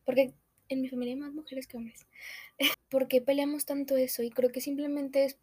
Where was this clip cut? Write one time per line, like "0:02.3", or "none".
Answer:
0:02.7